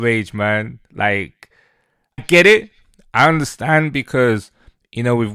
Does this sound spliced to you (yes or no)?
yes